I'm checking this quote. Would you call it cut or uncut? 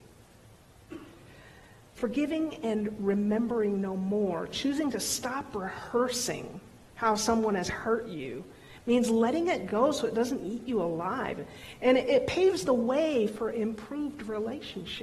uncut